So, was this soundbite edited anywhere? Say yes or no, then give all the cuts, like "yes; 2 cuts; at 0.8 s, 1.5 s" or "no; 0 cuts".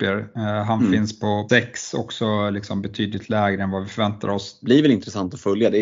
yes; 2 cuts; at 1.5 s, 4.6 s